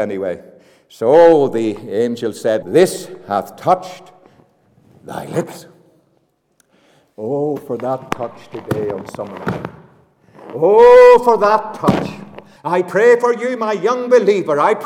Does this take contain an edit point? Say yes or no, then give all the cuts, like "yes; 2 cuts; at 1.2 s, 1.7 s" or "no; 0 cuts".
yes; 2 cuts; at 2.6 s, 12.6 s